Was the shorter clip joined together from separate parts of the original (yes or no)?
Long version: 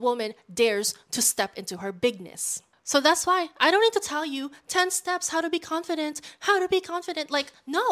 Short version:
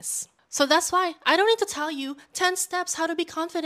no